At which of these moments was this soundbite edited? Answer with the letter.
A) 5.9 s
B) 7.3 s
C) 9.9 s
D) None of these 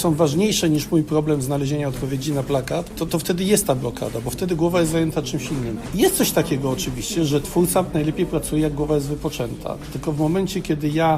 D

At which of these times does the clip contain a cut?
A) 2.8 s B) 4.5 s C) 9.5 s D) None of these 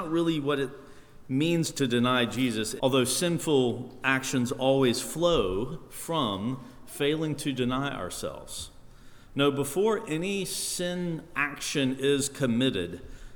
A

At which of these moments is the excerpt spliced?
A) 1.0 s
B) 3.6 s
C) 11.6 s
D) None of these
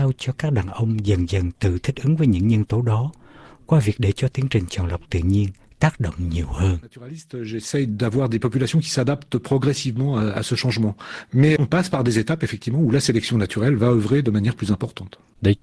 C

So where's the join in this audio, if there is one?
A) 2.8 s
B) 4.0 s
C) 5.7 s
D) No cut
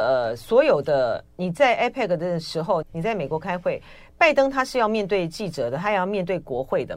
A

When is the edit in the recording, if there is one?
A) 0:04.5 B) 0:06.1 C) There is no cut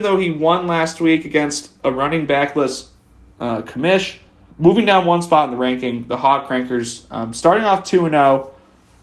A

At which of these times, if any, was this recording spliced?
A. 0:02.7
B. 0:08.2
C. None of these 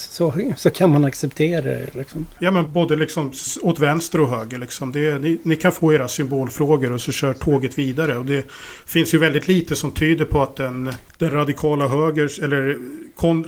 A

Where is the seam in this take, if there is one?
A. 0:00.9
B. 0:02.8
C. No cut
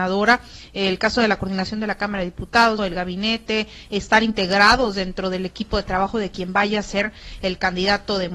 B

